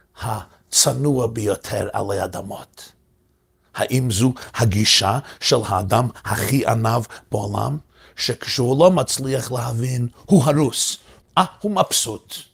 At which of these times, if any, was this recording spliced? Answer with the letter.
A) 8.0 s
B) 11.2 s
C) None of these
B